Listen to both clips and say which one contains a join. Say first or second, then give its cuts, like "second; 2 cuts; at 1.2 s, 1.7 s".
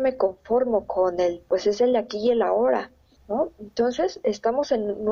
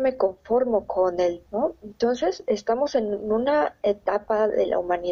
second; 1 cut; at 1.5 s